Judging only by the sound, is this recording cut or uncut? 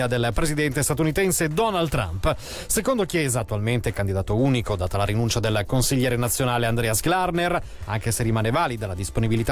uncut